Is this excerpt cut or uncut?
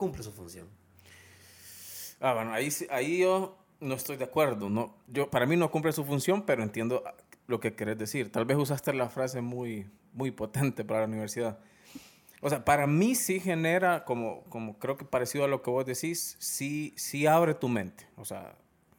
uncut